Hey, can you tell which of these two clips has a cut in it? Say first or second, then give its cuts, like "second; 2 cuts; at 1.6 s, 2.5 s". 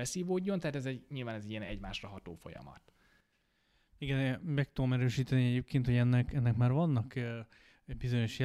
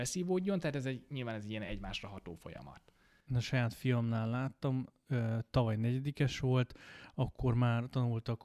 second; 1 cut; at 3.3 s